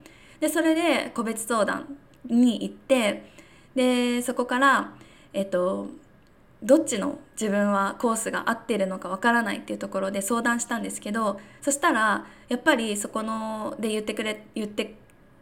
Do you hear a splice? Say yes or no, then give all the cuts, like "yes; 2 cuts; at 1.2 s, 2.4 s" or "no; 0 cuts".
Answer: no; 0 cuts